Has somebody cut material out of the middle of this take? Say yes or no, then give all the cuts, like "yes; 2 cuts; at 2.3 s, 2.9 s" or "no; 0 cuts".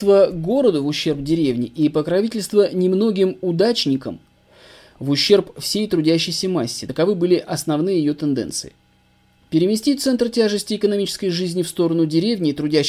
no; 0 cuts